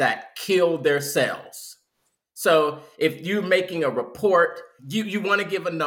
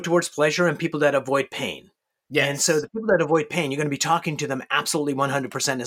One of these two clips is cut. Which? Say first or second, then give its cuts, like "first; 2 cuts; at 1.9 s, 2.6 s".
first; 1 cut; at 4.8 s